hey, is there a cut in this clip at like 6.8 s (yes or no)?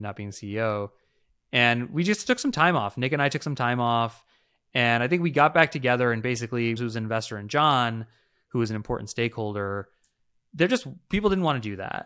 yes